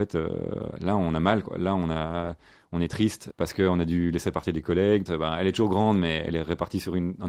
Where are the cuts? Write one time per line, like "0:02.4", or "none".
0:03.3
0:05.1